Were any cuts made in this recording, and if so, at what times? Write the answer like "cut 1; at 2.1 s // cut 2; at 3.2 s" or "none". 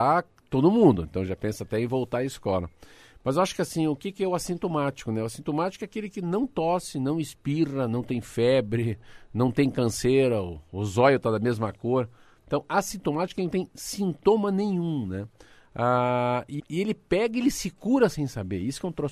cut 1; at 16.6 s